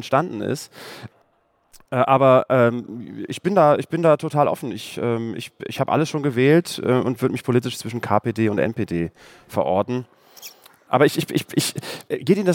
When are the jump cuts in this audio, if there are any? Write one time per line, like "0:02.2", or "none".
none